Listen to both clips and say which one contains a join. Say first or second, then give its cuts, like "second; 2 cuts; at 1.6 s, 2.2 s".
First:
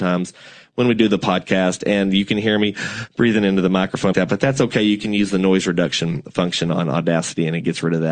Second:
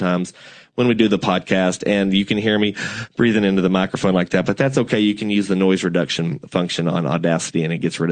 first; 1 cut; at 4.1 s